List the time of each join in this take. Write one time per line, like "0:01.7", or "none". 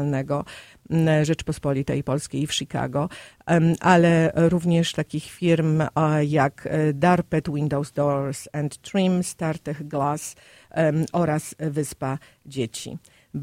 none